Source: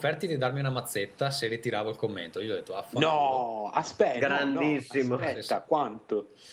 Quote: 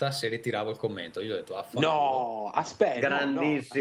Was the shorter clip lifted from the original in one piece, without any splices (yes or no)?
yes